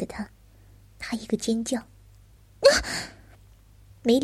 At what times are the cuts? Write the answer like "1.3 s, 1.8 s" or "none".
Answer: none